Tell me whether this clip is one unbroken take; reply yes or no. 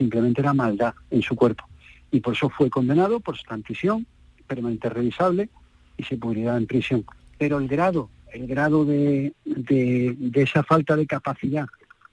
no